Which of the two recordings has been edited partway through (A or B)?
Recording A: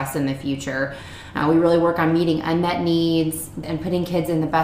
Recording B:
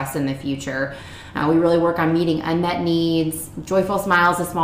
A